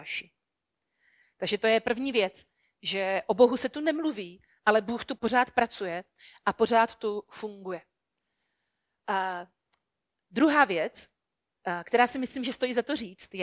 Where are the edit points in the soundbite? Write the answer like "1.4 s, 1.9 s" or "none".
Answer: 5.2 s